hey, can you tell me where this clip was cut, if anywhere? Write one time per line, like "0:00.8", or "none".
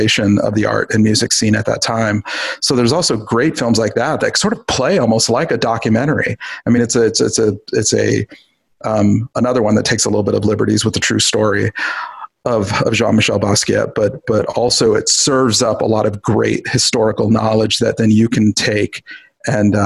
none

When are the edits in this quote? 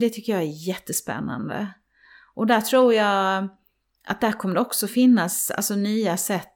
none

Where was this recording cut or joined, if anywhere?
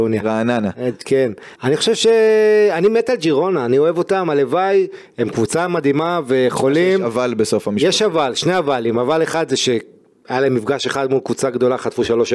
0:01.5

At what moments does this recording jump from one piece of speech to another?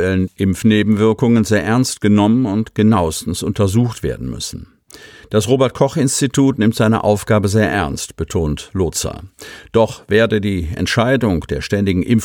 none

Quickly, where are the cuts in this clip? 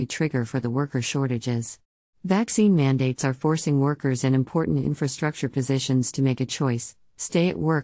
0:02.1

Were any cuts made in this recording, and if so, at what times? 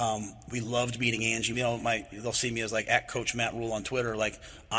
0:01.5

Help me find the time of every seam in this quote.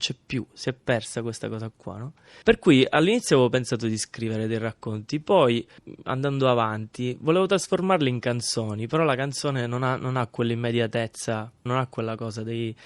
0:11.7

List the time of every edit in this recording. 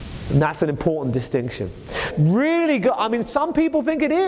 0:02.1

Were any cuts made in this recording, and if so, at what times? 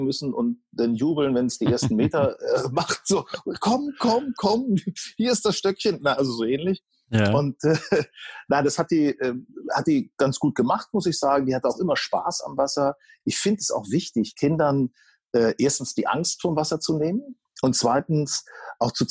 none

